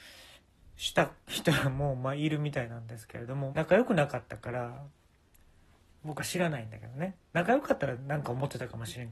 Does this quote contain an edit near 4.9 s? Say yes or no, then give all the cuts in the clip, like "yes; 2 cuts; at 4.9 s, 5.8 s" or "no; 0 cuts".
no; 1 cut; at 3.5 s